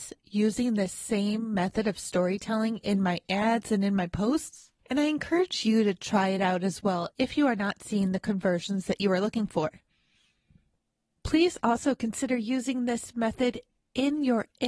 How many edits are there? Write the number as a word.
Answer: one